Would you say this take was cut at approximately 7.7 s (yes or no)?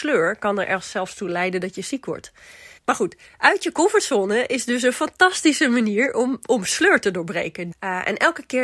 yes